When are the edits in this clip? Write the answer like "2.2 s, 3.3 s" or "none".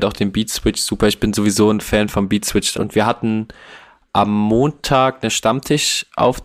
2.7 s